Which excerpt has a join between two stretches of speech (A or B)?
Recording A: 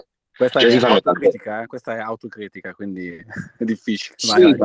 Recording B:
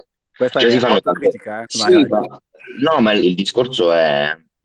B